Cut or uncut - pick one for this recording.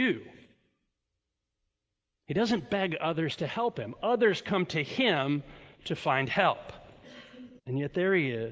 cut